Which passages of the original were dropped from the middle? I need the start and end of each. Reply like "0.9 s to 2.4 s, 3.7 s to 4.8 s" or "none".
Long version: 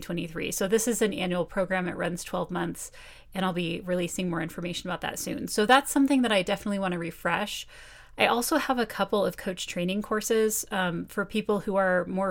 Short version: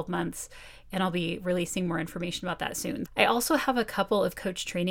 5.5 s to 8.1 s